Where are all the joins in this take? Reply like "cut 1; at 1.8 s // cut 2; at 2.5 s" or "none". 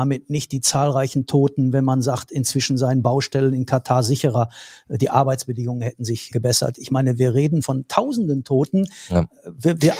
cut 1; at 6.3 s // cut 2; at 7.6 s